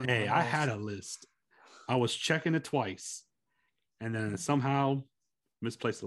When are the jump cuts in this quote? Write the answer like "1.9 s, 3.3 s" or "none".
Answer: none